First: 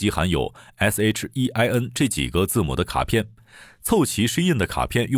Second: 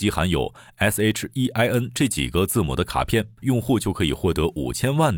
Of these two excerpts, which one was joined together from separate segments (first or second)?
second